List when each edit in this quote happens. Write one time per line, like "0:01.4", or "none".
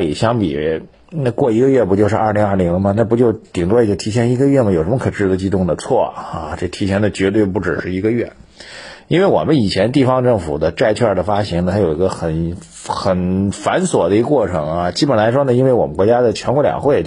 none